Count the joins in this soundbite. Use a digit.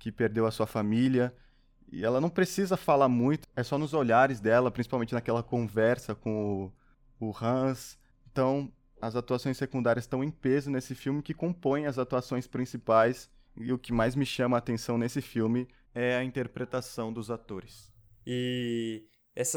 1